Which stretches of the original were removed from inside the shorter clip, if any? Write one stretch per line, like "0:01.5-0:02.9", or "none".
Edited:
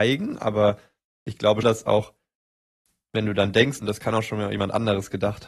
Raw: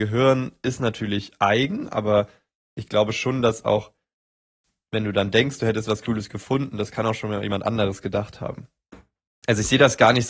0:03.1-0:03.4
0:05.6-0:06.7